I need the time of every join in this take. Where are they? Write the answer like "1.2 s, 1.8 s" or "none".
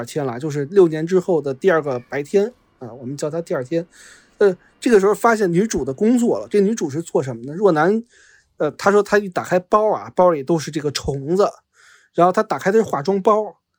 none